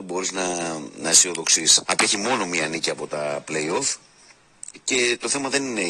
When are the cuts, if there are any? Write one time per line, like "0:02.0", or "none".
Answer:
0:01.9